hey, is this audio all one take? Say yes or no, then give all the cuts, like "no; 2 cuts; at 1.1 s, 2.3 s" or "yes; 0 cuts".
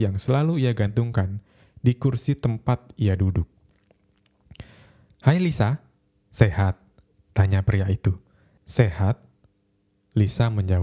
yes; 0 cuts